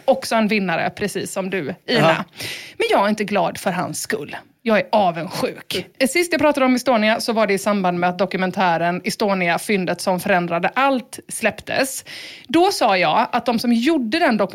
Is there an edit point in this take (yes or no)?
yes